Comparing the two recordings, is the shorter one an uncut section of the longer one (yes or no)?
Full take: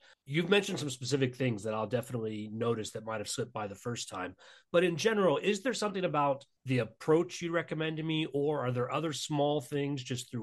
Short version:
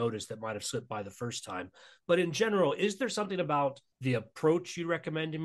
yes